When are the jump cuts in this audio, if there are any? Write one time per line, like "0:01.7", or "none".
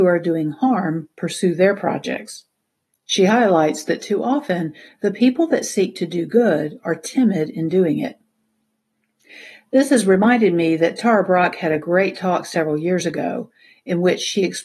none